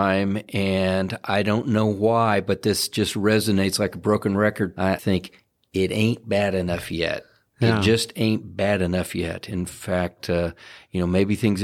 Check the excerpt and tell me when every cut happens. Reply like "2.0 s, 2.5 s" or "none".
none